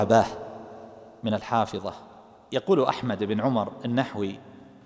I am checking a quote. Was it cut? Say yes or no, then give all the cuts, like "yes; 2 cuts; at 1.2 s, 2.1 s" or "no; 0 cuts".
no; 0 cuts